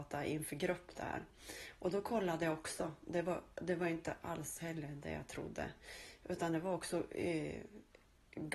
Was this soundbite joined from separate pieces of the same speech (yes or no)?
no